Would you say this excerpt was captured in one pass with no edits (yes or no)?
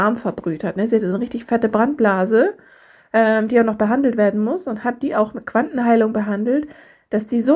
yes